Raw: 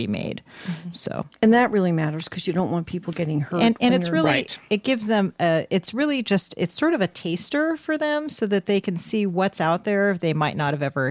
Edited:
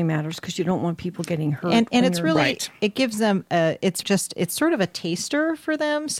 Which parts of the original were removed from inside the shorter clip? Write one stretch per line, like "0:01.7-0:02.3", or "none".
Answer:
0:05.9-0:06.2

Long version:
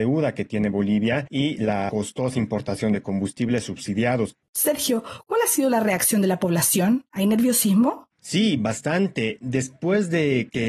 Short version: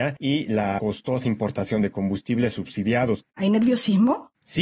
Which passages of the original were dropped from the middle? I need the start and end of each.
0:04.4-0:07.1

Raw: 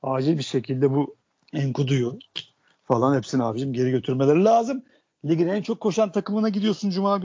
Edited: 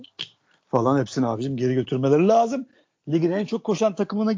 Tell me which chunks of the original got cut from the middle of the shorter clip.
none

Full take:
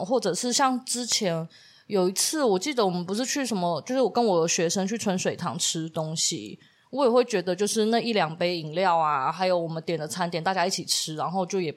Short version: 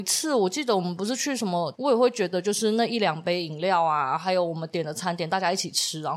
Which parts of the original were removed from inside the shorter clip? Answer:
0:03.8-0:06.9

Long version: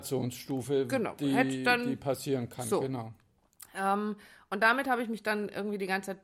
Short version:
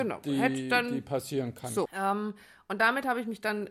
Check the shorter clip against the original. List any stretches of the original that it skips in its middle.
0:02.8-0:03.7

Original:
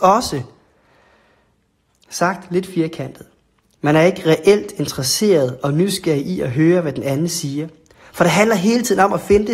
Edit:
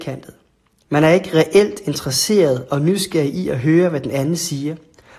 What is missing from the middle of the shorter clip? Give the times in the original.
none

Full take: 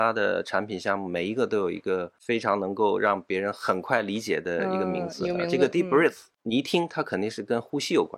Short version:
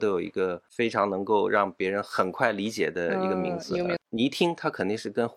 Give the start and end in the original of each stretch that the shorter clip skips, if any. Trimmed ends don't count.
0:05.5-0:06.3

